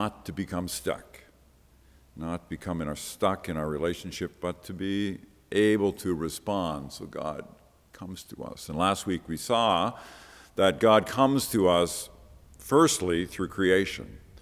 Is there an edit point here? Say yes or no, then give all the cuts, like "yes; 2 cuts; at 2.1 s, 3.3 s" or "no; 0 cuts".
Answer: no; 0 cuts